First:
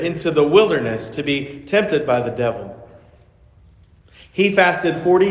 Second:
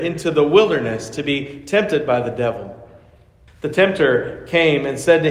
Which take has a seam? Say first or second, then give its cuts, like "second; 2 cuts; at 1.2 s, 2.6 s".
second; 1 cut; at 3.5 s